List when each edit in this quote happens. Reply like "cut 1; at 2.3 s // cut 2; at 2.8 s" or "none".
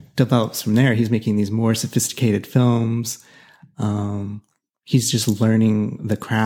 none